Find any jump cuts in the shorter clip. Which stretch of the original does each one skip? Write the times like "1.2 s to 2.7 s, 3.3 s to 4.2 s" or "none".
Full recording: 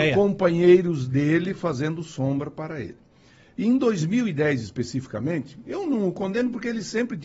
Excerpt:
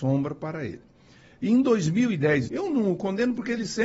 4.6 s to 5.6 s